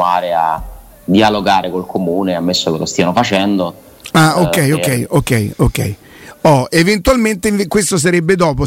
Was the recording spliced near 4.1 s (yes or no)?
no